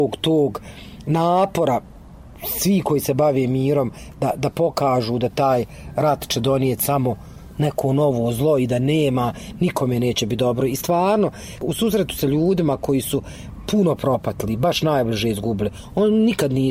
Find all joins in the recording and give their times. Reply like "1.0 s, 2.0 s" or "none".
none

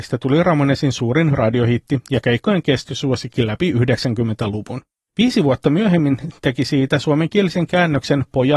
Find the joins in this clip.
none

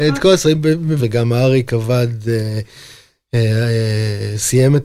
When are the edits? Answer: 1.0 s

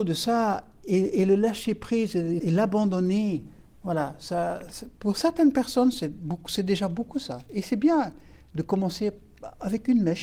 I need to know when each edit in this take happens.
2.4 s

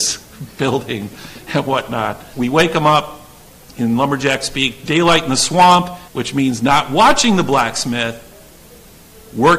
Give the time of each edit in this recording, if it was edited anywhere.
2.3 s, 6.1 s

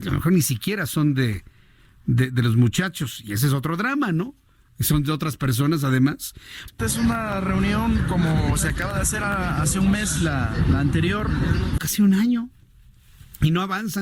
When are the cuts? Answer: 6.7 s, 11.8 s

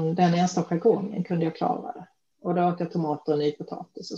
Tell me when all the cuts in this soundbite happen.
2.3 s

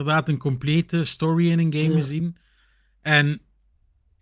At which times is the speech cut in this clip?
none

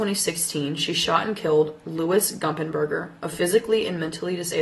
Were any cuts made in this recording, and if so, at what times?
none

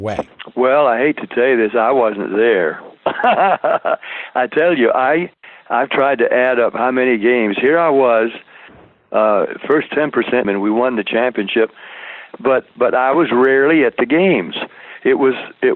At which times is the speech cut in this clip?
10.4 s, 12.3 s

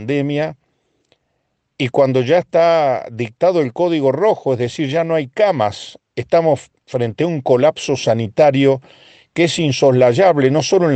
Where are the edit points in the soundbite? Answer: none

